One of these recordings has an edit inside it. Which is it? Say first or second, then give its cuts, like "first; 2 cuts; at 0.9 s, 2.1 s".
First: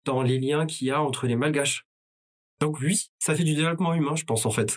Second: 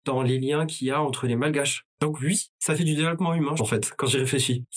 second; 2 cuts; at 1.9 s, 3.6 s